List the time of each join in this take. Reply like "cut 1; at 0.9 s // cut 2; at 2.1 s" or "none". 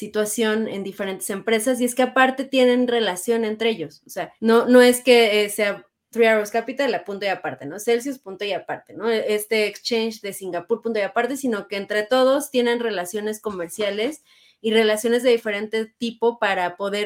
cut 1; at 4.4 s